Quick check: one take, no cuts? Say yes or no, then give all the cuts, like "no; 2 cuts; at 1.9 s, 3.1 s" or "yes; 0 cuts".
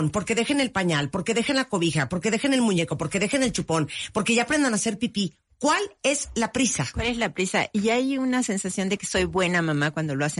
yes; 0 cuts